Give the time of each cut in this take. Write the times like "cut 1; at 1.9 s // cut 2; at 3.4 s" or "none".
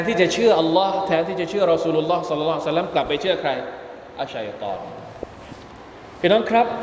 cut 1; at 4.3 s